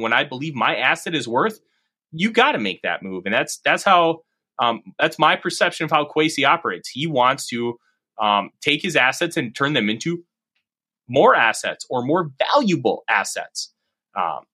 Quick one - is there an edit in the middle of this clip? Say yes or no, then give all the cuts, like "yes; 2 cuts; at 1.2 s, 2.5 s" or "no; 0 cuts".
no; 0 cuts